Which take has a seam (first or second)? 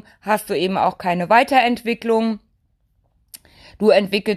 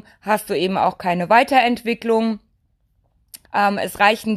second